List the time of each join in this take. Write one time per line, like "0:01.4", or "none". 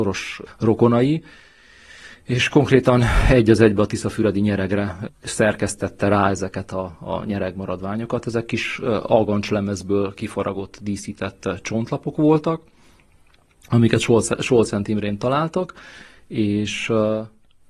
none